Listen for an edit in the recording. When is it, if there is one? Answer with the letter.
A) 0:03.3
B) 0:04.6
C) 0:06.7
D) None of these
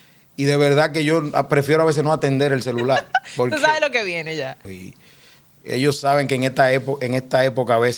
B